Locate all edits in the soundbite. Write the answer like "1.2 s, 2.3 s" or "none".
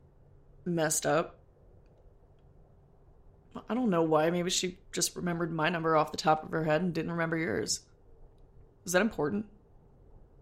none